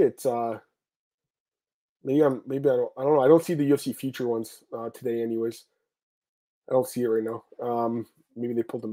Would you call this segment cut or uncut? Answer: uncut